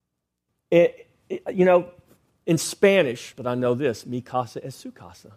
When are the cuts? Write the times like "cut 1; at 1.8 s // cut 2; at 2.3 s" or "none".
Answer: cut 1; at 3.3 s